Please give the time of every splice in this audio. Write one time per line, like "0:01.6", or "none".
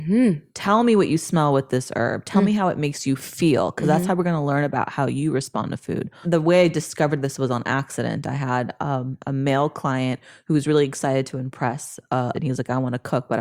0:06.2
0:12.3